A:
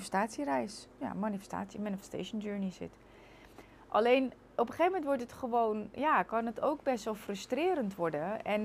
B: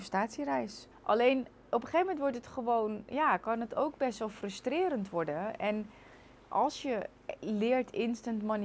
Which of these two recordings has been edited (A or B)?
B